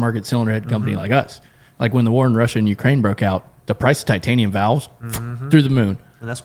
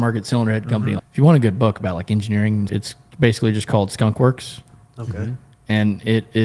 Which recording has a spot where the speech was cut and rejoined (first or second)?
second